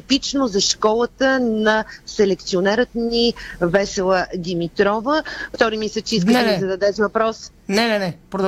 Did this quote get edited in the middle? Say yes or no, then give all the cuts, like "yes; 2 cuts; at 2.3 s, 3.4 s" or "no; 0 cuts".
yes; 1 cut; at 5.5 s